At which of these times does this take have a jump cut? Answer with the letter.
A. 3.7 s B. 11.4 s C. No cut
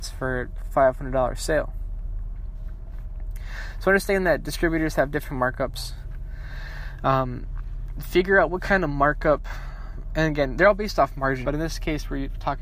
B